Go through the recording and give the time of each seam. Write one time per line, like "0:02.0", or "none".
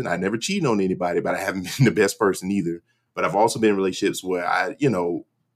none